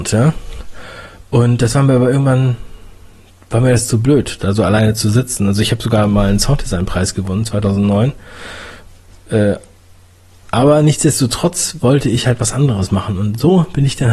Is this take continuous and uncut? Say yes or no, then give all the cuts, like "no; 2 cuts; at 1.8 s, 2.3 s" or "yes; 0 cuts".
yes; 0 cuts